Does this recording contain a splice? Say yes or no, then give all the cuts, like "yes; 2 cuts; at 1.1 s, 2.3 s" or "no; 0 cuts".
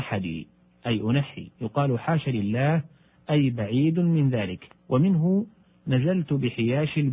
yes; 2 cuts; at 1.5 s, 4.8 s